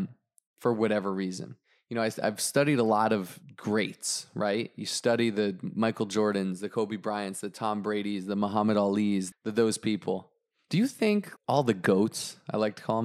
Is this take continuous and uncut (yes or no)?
no